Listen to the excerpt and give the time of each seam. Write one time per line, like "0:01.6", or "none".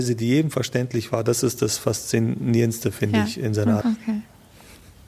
0:03.8